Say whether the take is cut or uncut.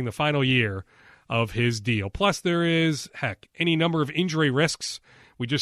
uncut